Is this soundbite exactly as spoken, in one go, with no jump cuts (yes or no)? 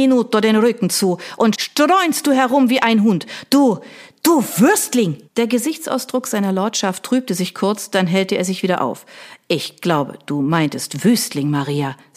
no